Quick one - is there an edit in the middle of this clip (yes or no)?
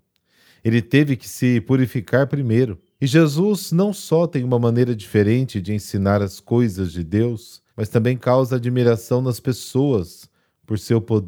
yes